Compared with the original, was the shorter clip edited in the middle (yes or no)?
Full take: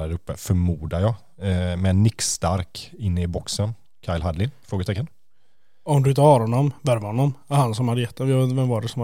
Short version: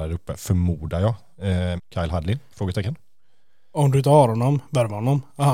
yes